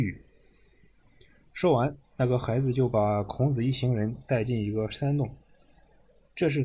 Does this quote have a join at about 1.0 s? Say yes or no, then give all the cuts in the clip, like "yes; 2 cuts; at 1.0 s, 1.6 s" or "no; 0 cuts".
yes; 1 cut; at 1.0 s